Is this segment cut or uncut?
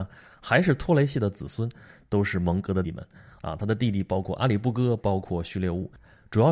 cut